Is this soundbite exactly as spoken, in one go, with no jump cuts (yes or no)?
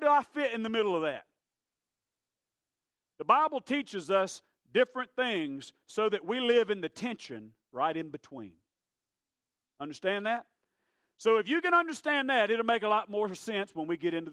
yes